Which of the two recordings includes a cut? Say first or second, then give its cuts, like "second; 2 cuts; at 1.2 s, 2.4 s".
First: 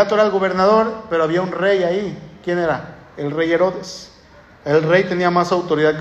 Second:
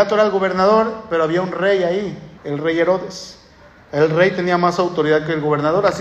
second; 1 cut; at 2.4 s